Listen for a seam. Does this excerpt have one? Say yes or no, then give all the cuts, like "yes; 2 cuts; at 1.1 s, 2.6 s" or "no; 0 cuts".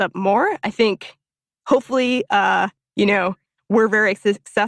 no; 0 cuts